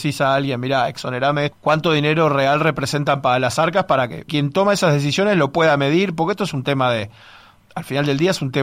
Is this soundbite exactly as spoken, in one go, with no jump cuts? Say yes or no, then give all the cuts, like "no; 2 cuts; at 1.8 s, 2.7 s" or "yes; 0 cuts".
no; 3 cuts; at 1.5 s, 4.3 s, 7.6 s